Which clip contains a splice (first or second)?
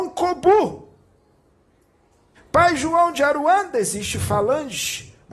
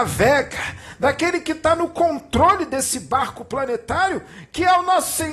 first